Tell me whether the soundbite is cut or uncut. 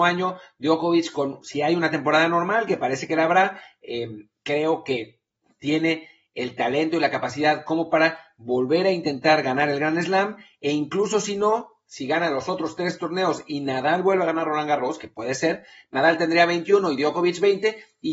uncut